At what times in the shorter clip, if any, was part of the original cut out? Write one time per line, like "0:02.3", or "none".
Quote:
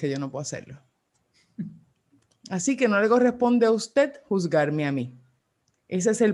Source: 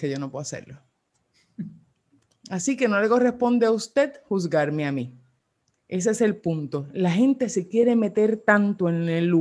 none